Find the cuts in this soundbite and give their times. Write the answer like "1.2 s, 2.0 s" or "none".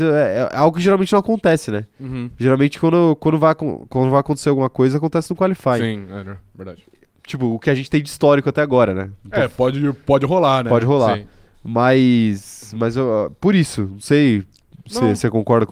none